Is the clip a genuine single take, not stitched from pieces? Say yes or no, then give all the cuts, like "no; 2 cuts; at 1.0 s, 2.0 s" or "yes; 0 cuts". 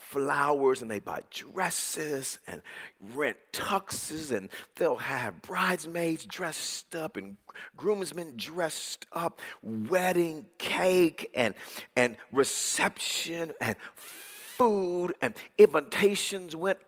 yes; 0 cuts